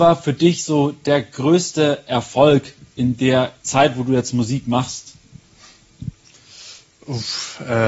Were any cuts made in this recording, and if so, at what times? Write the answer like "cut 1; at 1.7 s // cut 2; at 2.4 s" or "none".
cut 1; at 3.6 s